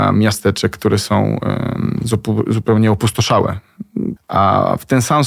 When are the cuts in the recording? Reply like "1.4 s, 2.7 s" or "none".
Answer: 4.2 s